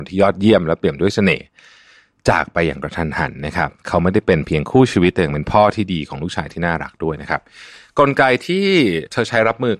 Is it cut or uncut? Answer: cut